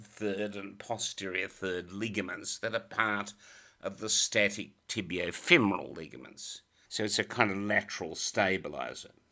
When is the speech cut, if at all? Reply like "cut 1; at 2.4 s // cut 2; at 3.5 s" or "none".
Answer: cut 1; at 6.8 s